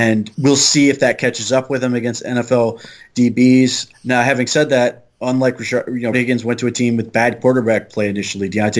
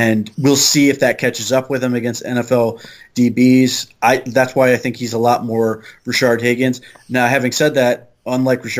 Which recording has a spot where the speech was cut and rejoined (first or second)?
first